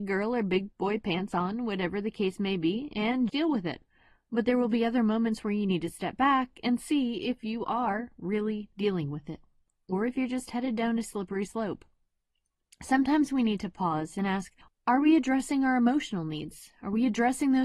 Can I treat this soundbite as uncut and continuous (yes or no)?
no